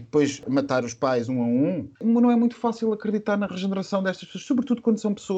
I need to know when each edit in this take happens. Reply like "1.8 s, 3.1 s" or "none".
2.0 s